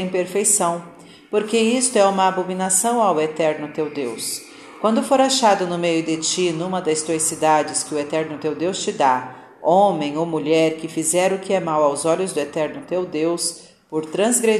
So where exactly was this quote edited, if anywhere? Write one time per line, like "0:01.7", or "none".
none